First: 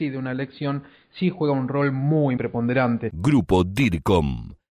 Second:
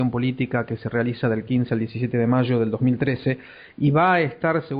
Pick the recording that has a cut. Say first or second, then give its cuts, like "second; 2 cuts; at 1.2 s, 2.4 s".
first; 1 cut; at 2.4 s